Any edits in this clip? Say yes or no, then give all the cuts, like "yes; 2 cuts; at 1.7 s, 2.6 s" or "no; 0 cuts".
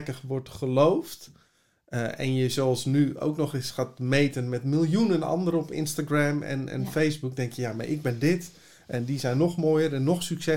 no; 0 cuts